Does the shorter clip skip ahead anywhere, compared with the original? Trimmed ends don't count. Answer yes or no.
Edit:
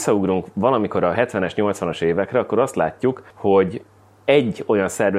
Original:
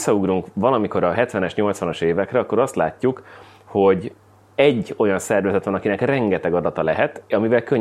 yes